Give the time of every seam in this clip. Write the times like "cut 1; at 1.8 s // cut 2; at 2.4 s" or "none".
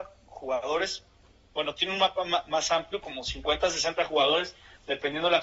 none